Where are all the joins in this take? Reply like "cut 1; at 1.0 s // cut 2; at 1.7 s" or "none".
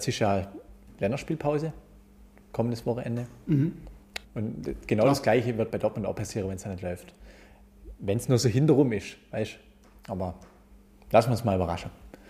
cut 1; at 4.2 s